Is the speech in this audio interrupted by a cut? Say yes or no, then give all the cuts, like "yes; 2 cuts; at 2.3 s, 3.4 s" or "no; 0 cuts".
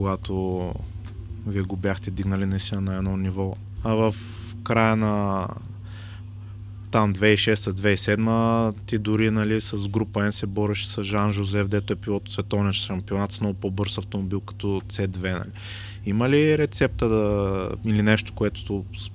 yes; 1 cut; at 3.8 s